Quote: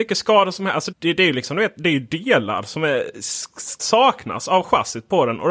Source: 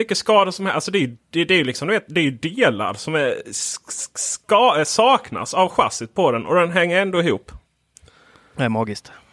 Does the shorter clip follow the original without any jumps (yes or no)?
no